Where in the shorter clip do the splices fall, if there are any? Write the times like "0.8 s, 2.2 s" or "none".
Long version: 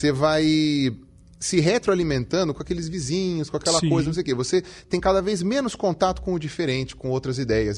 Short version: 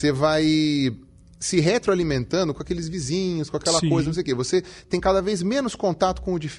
none

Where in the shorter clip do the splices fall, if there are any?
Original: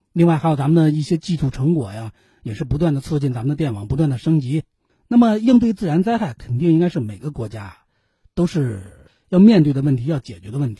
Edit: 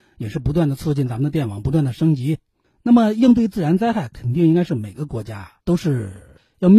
5.6 s

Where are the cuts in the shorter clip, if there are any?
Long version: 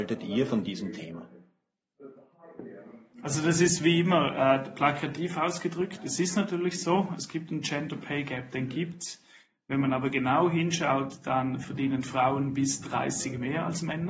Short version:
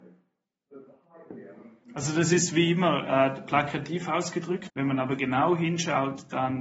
4.7 s

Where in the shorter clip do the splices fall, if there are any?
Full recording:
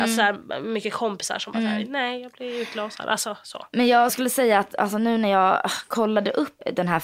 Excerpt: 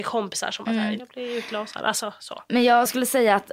1.0 s

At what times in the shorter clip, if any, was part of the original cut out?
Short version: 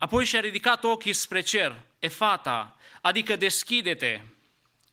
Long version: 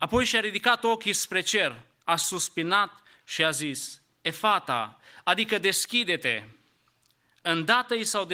2.0 s

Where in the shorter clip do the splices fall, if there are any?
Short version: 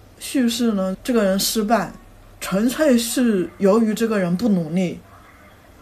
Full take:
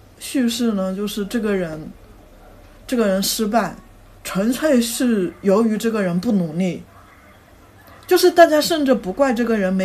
0.9 s

